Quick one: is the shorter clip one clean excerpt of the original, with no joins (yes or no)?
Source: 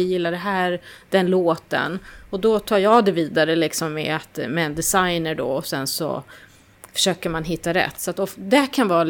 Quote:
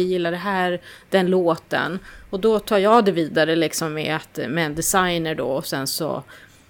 yes